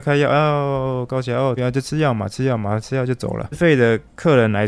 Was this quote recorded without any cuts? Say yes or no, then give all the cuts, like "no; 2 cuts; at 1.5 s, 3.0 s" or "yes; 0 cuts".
no; 2 cuts; at 1.6 s, 3.5 s